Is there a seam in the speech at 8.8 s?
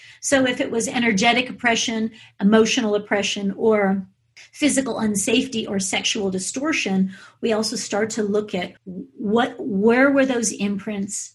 yes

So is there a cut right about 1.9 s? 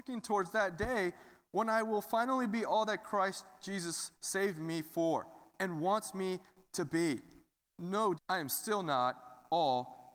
no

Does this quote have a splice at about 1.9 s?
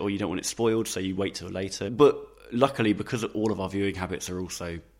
no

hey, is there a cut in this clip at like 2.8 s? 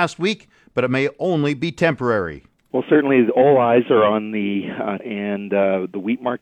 no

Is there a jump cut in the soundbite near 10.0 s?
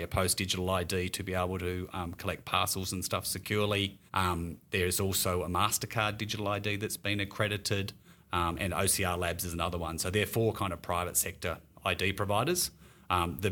no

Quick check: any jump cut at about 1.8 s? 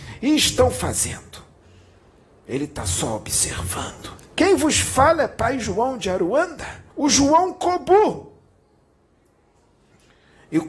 no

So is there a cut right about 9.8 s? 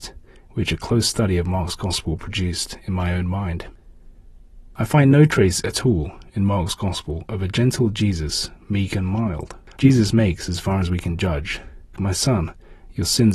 yes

